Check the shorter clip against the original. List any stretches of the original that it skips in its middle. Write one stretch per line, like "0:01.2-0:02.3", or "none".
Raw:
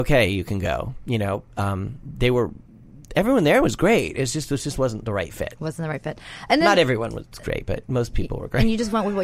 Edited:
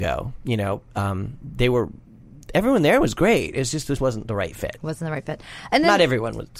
0:04.6-0:04.7